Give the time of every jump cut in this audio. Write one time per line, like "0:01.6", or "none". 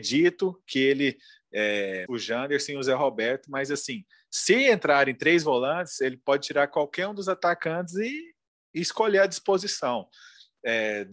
0:02.1